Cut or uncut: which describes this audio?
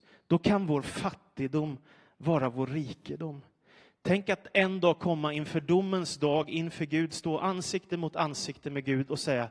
uncut